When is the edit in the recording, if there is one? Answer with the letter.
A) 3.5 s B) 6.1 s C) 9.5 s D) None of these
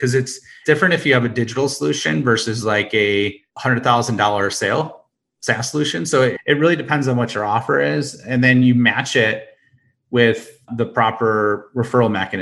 A